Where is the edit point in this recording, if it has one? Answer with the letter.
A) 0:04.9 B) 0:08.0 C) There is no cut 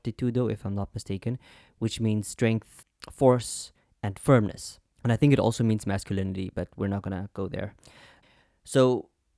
A